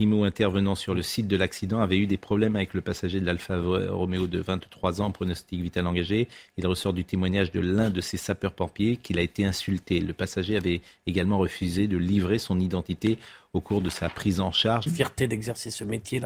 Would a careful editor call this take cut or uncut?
cut